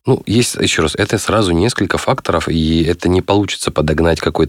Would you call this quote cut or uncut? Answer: uncut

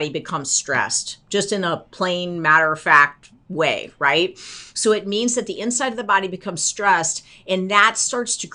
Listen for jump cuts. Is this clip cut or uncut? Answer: uncut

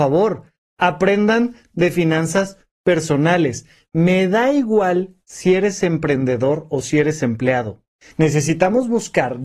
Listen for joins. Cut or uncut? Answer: cut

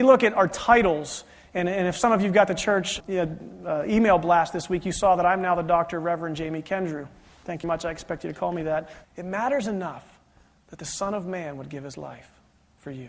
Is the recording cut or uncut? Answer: cut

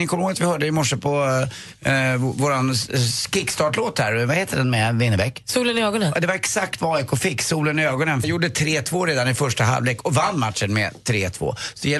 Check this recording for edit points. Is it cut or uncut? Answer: cut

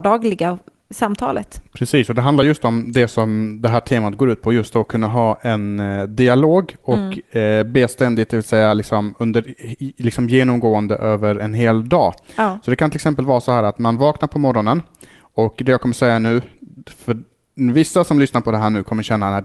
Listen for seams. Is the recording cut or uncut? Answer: uncut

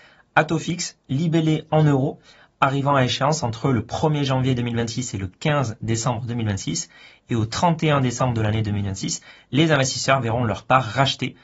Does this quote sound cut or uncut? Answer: uncut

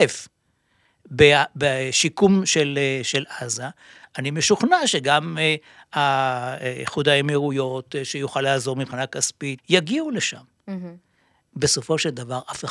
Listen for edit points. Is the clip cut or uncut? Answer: cut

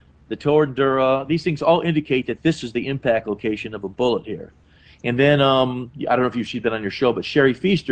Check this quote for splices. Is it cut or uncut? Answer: uncut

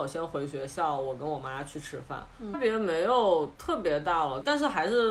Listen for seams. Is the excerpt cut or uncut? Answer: cut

